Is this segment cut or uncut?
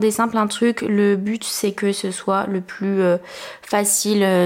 uncut